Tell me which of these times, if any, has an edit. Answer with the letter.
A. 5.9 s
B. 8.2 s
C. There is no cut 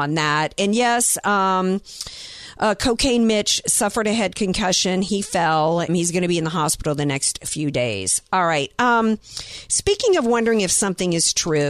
A